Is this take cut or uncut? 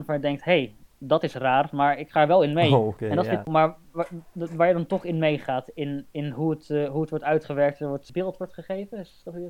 uncut